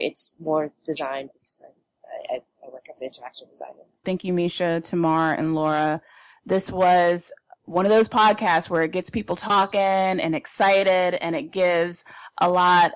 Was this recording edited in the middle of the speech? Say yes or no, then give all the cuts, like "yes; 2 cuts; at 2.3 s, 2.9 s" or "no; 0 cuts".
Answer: yes; 1 cut; at 4.0 s